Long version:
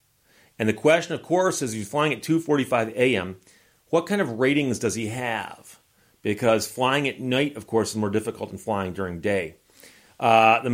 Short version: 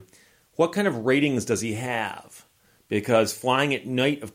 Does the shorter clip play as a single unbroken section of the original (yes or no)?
yes